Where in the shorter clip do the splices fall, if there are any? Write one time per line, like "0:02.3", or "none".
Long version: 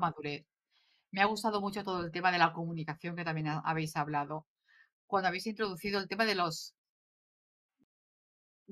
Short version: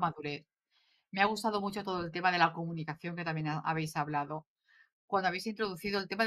none